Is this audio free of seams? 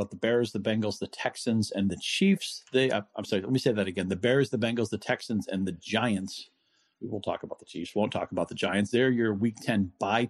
yes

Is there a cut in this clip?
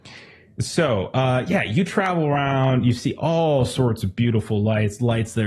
no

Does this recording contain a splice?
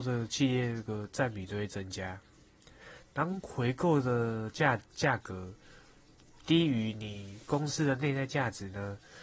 no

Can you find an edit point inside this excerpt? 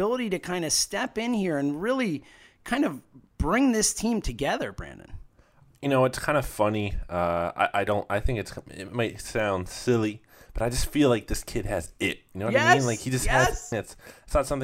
yes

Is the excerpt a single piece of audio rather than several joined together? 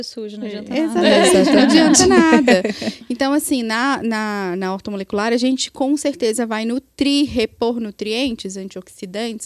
yes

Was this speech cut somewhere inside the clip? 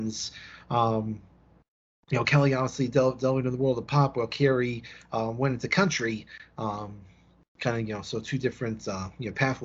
no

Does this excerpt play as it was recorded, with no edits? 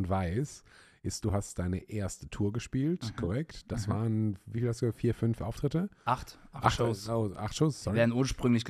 yes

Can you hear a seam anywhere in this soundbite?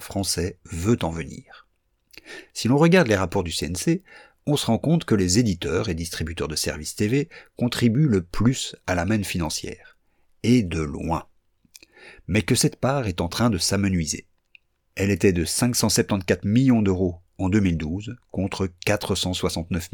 no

